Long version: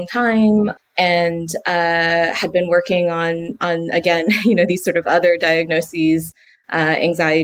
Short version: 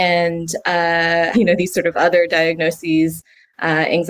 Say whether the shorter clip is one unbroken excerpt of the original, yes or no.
no